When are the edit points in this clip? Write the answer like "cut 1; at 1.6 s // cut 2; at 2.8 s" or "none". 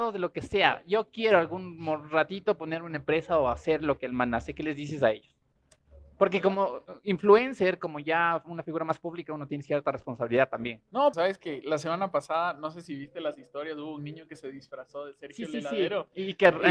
cut 1; at 11.1 s